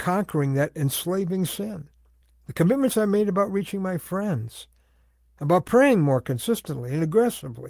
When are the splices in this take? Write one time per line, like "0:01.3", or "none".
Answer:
0:02.3